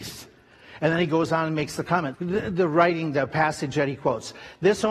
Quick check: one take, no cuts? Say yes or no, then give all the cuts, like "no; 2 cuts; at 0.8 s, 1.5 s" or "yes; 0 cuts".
no; 1 cut; at 2.1 s